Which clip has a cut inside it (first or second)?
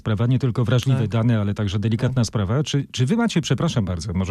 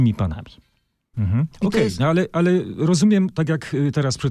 second